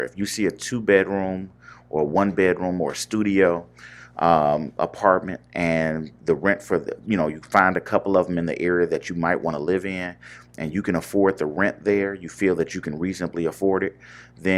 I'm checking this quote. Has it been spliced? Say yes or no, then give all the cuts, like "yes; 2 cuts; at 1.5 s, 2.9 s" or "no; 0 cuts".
no; 0 cuts